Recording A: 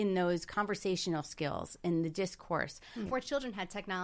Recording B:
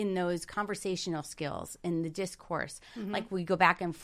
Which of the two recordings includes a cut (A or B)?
A